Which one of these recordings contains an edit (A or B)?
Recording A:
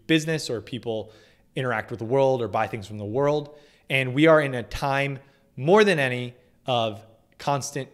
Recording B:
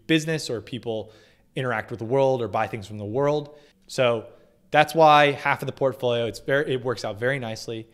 B